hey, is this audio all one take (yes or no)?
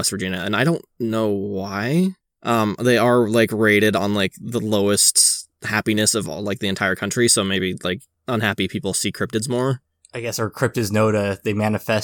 yes